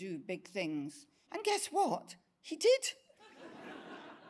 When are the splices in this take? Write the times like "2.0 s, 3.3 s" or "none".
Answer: 1.3 s